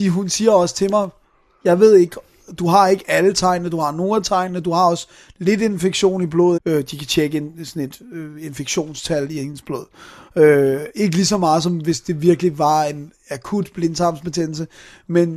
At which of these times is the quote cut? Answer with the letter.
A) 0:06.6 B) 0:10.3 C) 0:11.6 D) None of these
A